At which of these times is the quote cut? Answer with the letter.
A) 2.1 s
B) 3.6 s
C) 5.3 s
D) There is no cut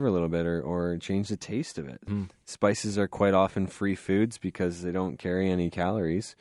A